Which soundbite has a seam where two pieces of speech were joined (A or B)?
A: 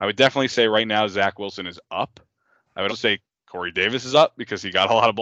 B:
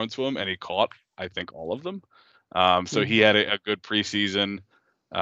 A